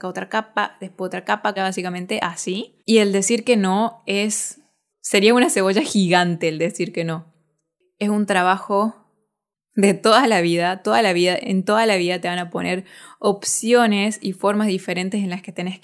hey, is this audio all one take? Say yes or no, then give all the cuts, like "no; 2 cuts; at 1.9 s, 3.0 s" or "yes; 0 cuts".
no; 3 cuts; at 1.6 s, 2.8 s, 4.9 s